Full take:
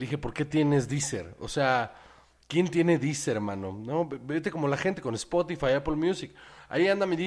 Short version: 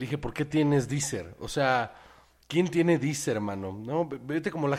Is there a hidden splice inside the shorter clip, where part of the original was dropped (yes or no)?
no